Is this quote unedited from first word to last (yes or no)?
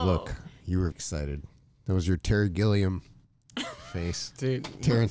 no